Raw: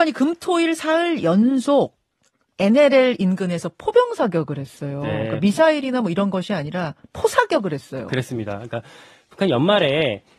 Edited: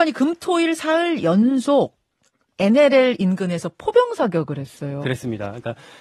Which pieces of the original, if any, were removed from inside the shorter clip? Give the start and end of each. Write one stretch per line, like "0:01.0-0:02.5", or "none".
0:05.0-0:08.1